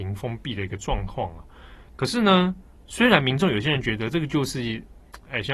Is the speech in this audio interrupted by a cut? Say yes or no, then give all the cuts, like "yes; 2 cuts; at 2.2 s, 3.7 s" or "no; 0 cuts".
no; 0 cuts